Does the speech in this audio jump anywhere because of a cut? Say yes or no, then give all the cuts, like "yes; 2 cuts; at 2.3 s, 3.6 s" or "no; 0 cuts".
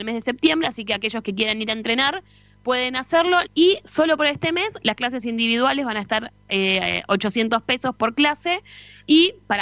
yes; 1 cut; at 3.4 s